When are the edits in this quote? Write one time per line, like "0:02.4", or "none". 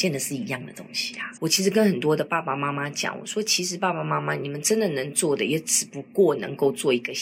0:01.4